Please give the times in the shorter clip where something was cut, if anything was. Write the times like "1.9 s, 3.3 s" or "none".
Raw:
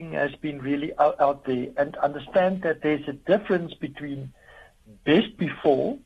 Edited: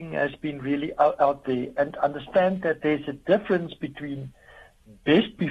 none